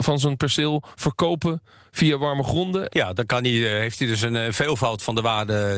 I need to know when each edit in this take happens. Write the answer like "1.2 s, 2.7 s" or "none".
2.9 s